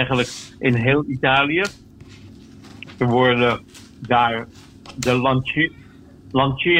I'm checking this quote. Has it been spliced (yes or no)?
no